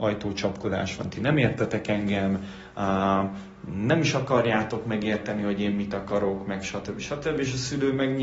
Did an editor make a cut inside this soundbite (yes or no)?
no